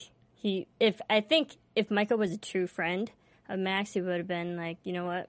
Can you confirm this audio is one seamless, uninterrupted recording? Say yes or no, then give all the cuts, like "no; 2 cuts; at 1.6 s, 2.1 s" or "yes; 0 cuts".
yes; 0 cuts